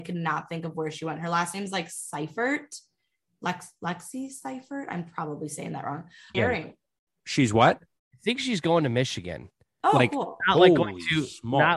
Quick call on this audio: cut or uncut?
cut